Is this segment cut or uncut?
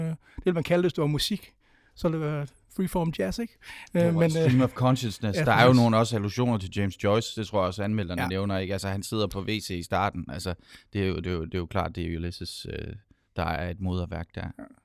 uncut